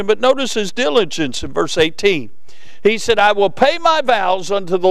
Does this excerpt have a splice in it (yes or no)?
no